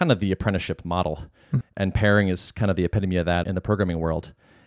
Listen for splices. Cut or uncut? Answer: cut